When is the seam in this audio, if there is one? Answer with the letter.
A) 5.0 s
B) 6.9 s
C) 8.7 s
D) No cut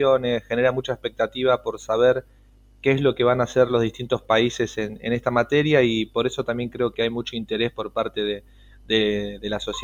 B